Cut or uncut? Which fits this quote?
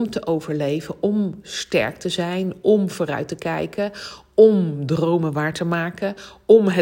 uncut